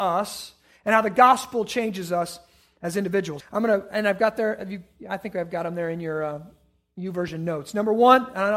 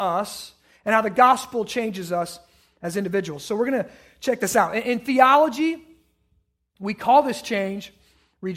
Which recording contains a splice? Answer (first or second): first